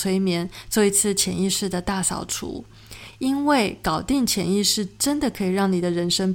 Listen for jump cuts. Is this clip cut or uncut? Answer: uncut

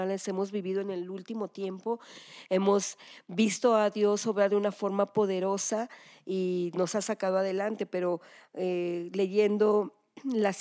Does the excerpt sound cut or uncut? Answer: uncut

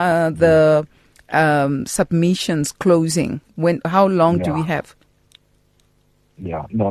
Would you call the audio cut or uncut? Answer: uncut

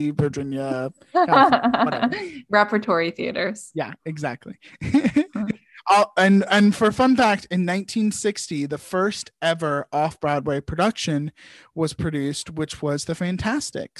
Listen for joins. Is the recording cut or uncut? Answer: uncut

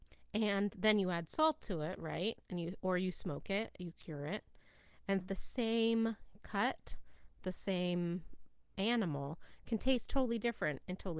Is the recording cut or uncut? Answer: cut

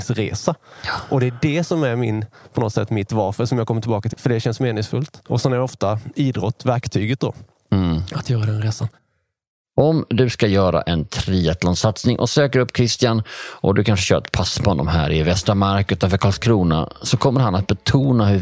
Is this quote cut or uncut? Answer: cut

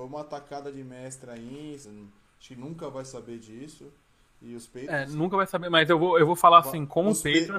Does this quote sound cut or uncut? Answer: cut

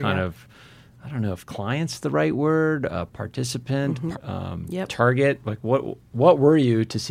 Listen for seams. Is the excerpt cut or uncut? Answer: cut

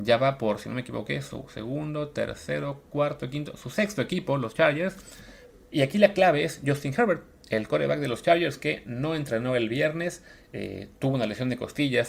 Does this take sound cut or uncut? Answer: cut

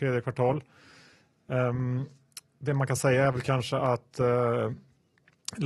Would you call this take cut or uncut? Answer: uncut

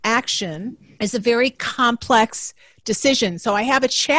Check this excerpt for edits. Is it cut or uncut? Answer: cut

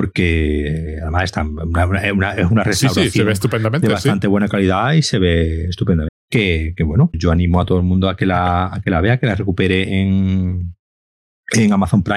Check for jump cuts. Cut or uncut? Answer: cut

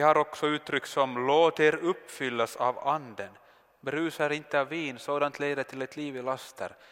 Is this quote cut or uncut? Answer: uncut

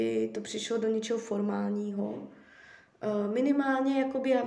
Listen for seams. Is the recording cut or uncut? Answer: uncut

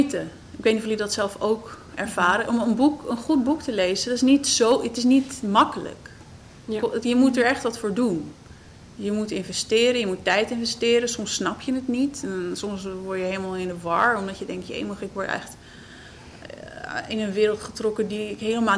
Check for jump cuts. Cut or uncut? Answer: uncut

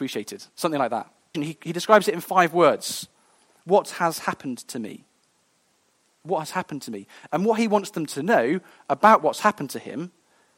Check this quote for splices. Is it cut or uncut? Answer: cut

